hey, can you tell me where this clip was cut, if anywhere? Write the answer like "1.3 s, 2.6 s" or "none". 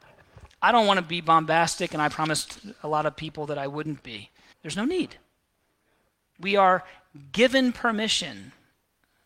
4.5 s